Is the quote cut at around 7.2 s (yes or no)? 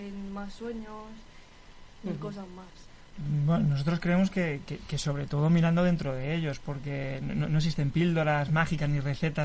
no